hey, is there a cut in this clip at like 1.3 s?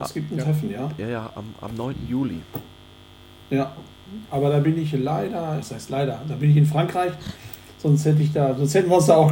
no; 1 cut; at 5.6 s

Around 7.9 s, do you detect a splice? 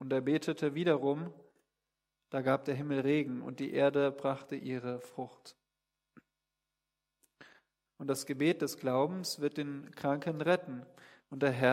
yes; 1 cut; at 7.9 s

